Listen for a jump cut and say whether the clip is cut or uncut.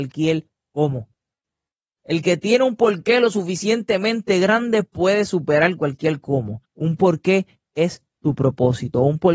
cut